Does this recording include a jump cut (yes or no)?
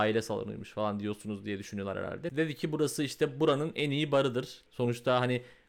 yes